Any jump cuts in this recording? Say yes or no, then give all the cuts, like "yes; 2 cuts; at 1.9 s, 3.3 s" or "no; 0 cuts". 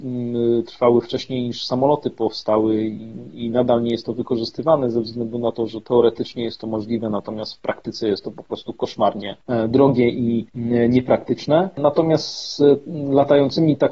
no; 0 cuts